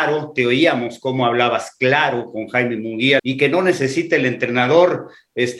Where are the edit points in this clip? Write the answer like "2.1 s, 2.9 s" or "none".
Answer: 3.2 s